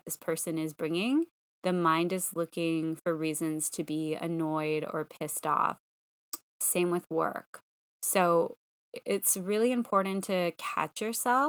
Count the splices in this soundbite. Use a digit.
0